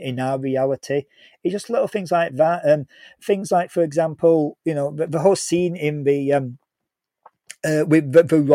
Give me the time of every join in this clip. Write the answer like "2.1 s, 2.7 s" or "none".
none